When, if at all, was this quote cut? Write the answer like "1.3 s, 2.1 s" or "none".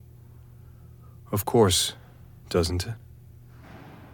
2.4 s